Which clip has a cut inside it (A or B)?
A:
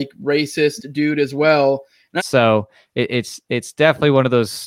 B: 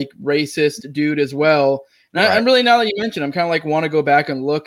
A